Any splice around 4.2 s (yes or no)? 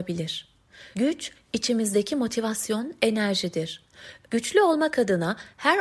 yes